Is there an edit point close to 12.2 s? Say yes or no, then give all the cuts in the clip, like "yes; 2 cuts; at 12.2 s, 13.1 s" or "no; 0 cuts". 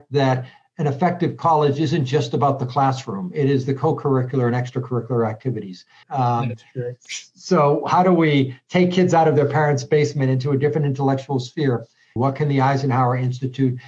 yes; 2 cuts; at 6.0 s, 12.2 s